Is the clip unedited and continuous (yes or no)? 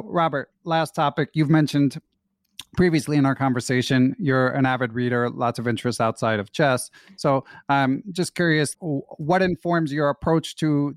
no